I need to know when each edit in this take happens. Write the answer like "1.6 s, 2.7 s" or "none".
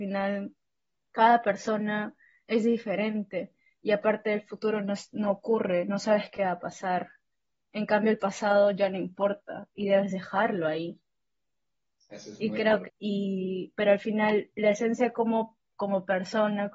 12.8 s